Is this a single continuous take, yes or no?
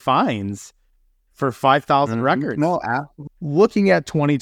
no